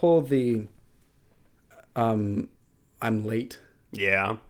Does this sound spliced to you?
no; 0 cuts

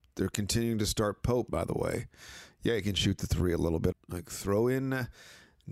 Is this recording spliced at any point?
yes; 2 cuts; at 1.5 s, 3.9 s

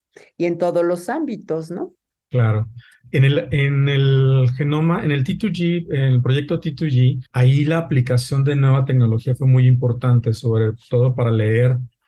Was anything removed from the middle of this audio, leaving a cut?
no; 0 cuts

